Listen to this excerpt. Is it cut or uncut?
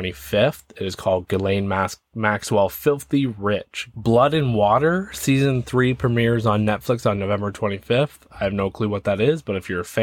cut